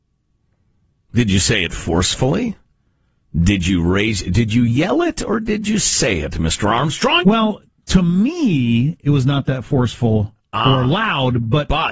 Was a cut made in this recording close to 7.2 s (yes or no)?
yes